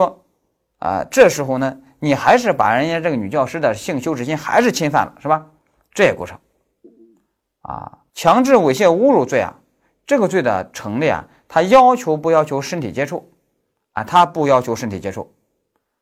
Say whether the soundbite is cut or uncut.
cut